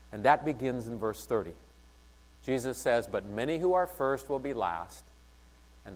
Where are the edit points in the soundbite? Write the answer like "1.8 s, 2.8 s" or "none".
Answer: 2.4 s